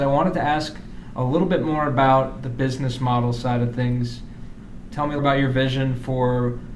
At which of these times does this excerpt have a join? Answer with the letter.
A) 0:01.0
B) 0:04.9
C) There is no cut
B